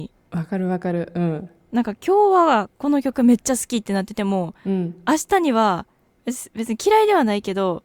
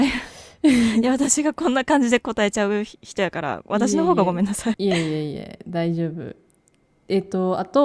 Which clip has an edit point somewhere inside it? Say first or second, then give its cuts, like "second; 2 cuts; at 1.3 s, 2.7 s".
second; 1 cut; at 4.7 s